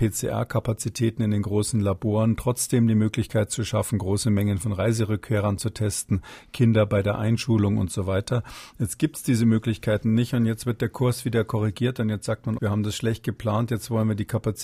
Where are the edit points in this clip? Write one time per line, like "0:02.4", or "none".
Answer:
0:12.6